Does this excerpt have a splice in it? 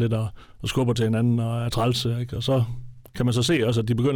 no; 0 cuts

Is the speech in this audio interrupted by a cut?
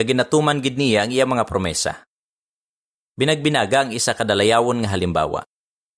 no; 0 cuts

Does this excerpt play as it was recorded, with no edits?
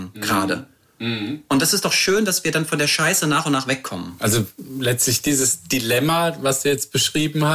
no; 1 cut; at 4.2 s

